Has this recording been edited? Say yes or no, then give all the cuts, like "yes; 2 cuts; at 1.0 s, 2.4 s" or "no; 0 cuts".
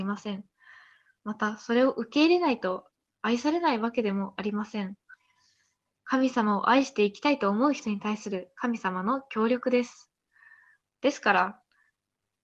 no; 0 cuts